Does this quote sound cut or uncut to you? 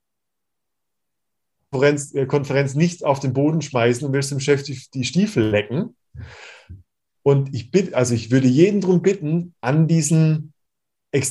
cut